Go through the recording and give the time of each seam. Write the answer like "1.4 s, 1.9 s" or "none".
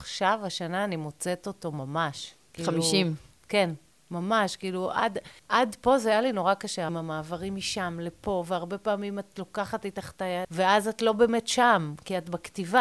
5.4 s, 6.9 s, 10.4 s